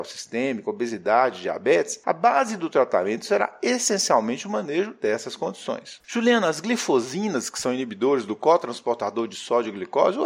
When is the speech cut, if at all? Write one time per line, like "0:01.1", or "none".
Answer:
0:06.0